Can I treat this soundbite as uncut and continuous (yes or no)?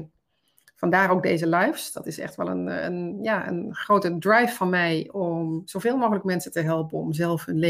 yes